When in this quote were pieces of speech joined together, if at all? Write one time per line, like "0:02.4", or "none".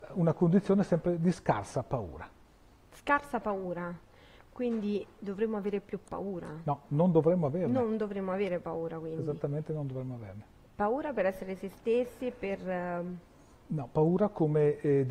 none